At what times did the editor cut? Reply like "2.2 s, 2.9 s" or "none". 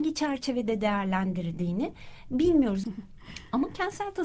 2.8 s